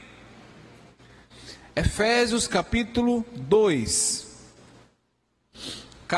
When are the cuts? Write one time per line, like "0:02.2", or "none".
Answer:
0:01.6